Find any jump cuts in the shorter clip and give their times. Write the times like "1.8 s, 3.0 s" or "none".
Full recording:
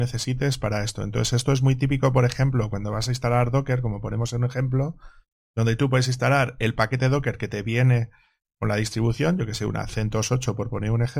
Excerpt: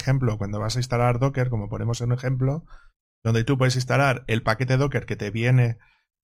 none

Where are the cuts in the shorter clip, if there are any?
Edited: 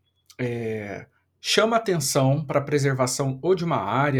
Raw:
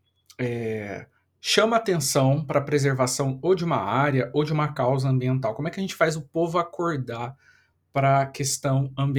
none

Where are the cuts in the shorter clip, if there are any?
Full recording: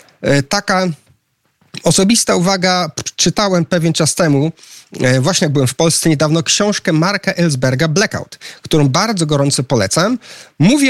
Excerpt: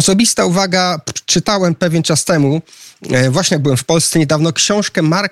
none

